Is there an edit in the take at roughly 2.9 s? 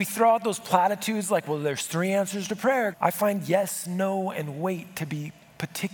yes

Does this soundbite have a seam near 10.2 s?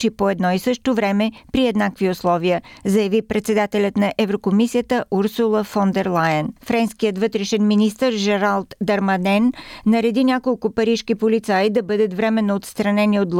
no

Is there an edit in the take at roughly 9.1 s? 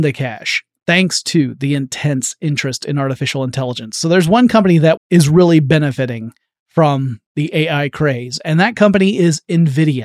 no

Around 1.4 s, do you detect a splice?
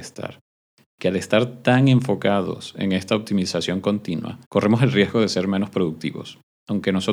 no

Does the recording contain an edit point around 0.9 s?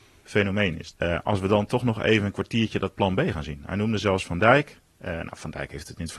yes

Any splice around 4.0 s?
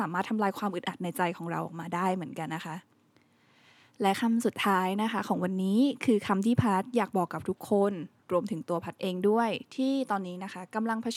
no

